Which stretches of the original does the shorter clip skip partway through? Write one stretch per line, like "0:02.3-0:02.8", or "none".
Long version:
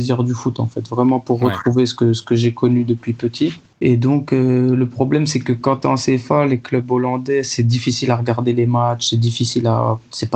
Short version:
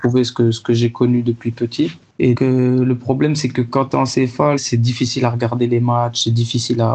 0:04.0-0:04.3
0:06.5-0:07.4